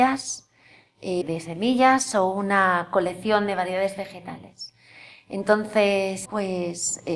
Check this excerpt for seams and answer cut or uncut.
cut